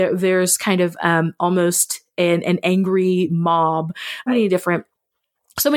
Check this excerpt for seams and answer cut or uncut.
cut